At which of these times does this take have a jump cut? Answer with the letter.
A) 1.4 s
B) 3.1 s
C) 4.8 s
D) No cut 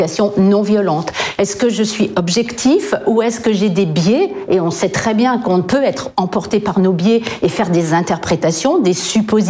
A